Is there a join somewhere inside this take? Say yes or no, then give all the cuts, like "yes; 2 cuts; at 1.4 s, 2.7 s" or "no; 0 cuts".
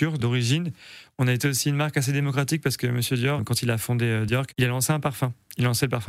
yes; 1 cut; at 3.4 s